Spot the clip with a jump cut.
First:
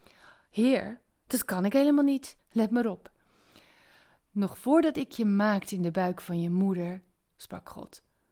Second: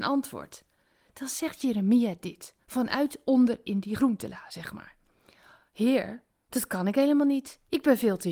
first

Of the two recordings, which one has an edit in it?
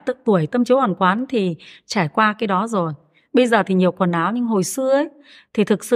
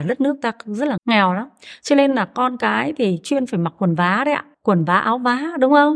second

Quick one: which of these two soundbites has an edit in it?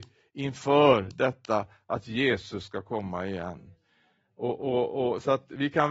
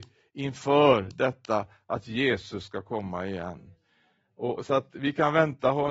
second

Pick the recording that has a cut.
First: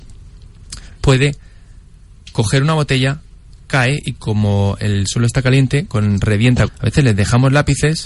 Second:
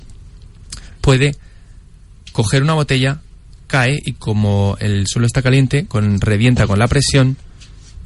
first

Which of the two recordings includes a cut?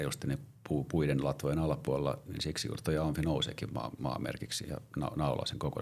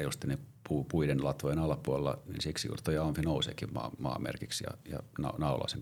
first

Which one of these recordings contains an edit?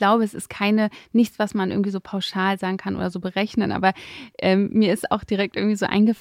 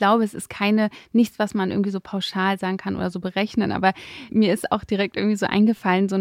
second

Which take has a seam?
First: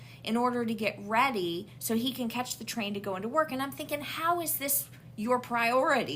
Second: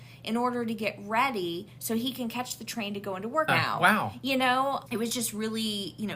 second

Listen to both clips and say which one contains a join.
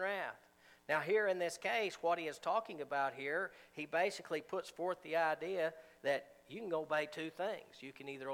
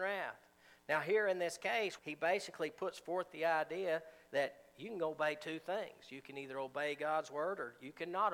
second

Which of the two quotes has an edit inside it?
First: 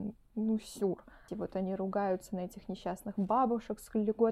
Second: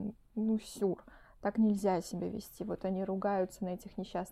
first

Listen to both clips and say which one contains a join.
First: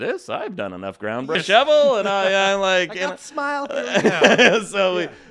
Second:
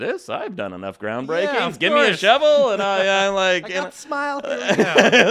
first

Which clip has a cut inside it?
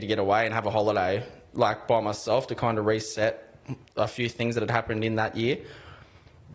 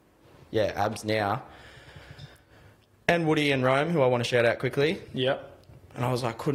second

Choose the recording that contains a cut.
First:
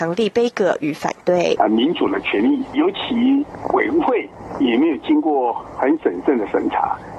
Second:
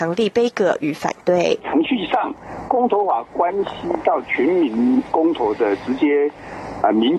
first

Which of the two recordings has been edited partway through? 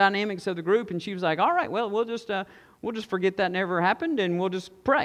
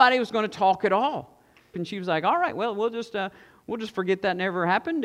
second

